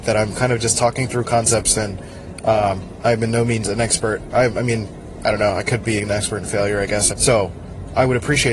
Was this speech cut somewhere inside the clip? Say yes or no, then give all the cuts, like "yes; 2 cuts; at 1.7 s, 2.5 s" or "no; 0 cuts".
yes; 1 cut; at 7.1 s